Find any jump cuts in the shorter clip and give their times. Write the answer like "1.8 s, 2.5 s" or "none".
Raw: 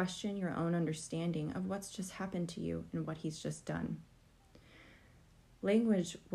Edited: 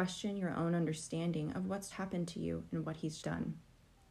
1.9 s, 3.2 s